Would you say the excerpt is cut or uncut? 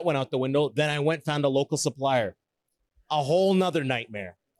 uncut